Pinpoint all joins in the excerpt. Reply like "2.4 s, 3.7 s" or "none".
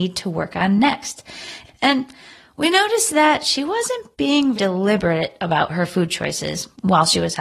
1.7 s, 4.5 s